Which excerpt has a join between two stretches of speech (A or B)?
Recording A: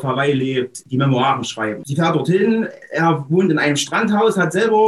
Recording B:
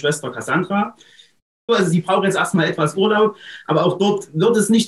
B